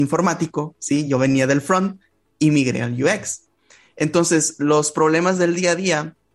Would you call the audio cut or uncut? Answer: uncut